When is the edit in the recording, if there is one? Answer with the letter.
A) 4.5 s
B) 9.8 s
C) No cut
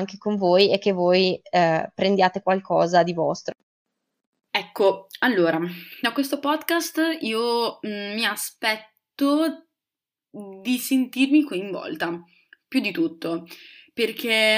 A